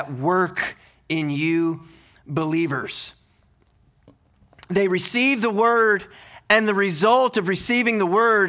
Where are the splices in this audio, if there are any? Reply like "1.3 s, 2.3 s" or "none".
none